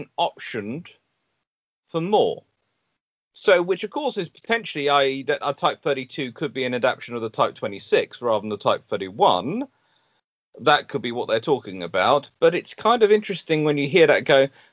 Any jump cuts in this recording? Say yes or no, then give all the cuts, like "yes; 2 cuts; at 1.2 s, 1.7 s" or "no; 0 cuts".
no; 0 cuts